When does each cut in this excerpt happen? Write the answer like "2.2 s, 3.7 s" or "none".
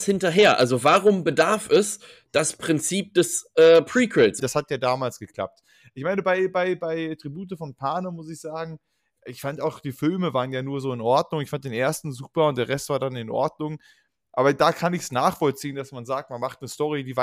4.4 s